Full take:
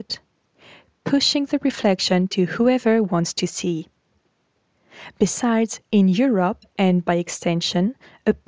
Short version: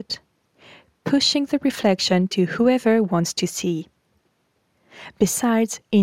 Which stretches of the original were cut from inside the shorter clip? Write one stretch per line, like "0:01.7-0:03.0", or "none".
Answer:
none